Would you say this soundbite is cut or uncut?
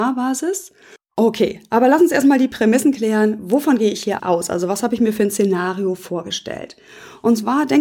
cut